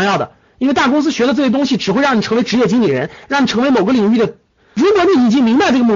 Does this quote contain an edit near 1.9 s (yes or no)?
no